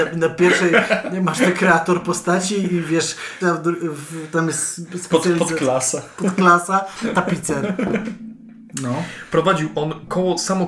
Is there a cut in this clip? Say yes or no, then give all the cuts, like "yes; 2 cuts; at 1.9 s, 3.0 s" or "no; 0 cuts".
yes; 1 cut; at 3.4 s